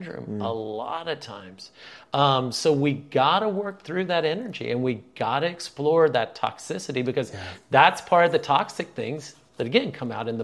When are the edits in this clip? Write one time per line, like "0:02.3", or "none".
none